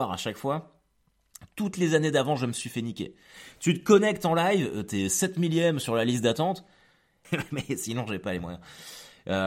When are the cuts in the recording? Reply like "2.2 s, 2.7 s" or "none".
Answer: 7.2 s

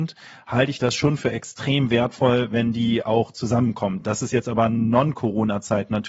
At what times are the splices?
none

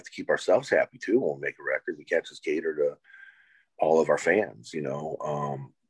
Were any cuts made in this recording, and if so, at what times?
none

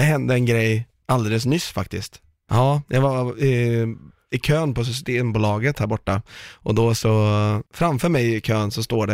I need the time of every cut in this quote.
2.5 s, 7.7 s

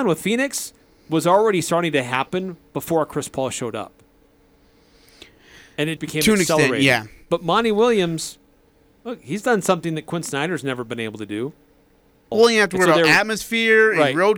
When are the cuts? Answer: 6.0 s, 12.3 s

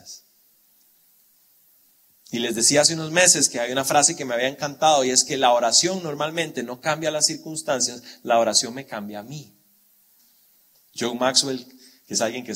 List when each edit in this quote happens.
10.7 s

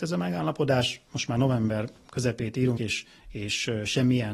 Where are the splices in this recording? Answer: 2.8 s

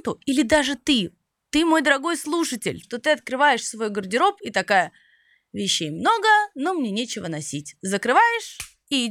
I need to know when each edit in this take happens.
2.8 s

